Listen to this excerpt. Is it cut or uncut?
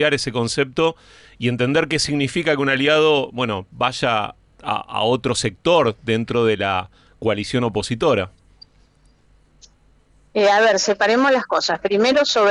uncut